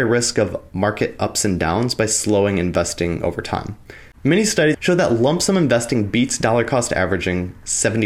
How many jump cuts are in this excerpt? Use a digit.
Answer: 1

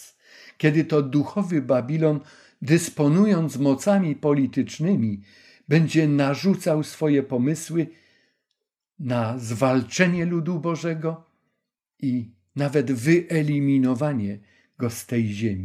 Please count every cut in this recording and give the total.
0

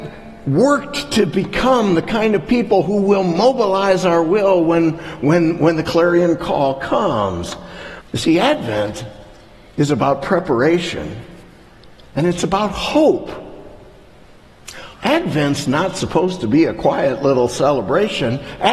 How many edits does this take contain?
2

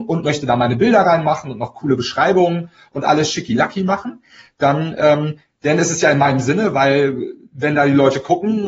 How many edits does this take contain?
0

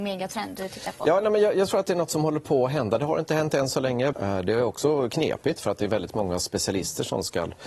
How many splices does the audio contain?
1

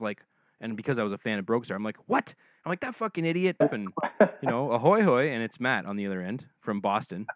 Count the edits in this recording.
1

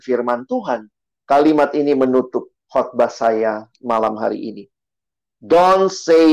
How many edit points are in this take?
1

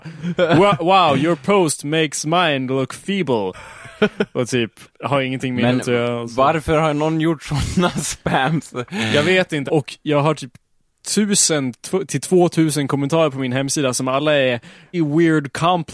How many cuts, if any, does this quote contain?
3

